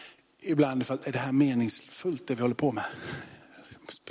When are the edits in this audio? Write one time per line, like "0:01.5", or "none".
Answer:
none